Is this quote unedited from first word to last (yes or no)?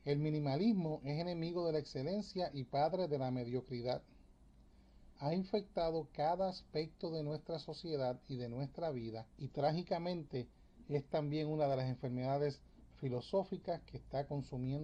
no